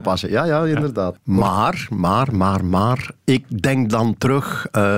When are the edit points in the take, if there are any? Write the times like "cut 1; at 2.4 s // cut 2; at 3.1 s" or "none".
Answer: cut 1; at 1.1 s